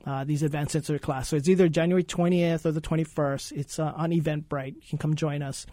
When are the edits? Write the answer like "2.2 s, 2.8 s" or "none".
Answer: none